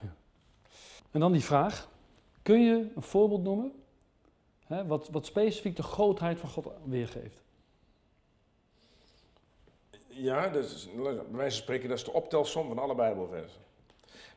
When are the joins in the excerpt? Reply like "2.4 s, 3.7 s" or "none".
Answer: 1.0 s